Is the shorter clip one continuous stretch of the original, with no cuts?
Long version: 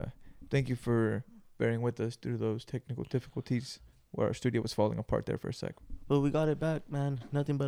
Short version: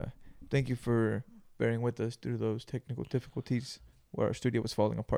yes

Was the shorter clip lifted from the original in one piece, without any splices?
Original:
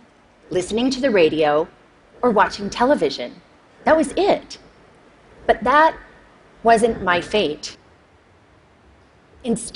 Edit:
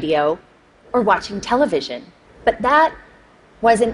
no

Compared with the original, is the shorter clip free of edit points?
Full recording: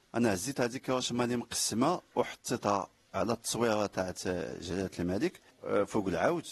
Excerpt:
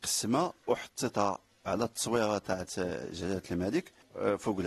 yes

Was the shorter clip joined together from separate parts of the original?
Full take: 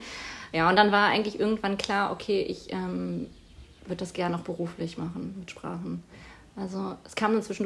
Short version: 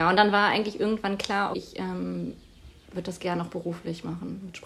yes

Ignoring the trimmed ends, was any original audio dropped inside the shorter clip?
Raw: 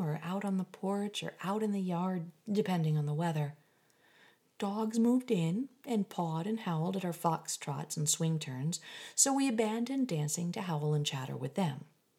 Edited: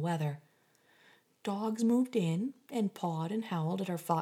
no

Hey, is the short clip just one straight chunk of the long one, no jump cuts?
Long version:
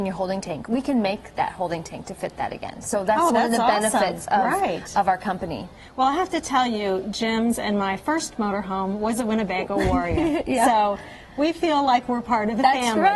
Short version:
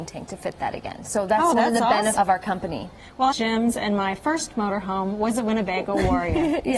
no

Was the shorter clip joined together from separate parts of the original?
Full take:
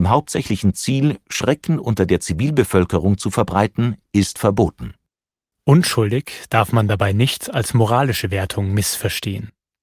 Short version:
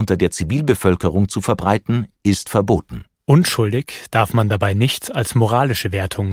yes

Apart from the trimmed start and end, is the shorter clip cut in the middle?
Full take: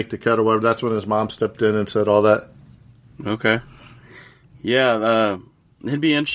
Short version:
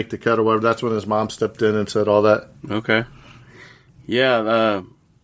yes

